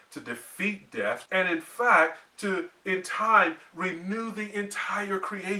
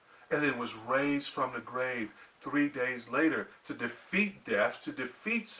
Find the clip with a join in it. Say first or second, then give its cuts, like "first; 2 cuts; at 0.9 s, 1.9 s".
first; 1 cut; at 1.3 s